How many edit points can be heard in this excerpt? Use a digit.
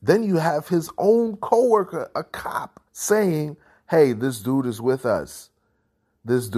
1